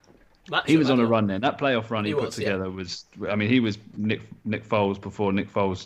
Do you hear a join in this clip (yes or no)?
no